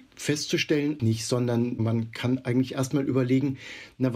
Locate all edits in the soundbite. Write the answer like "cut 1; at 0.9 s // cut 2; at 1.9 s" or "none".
cut 1; at 1.0 s